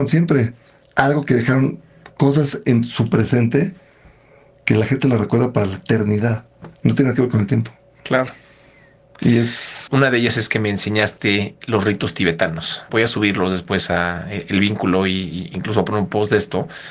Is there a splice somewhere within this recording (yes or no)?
yes